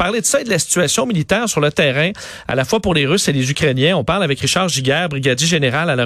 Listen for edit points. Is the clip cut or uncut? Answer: uncut